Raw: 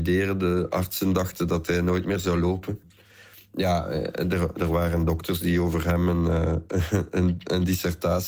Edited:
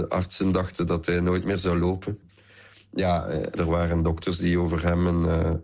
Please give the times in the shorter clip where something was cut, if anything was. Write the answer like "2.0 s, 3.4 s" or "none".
3.5 s